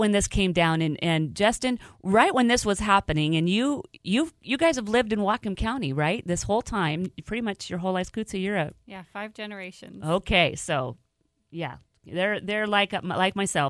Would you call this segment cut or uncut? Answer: uncut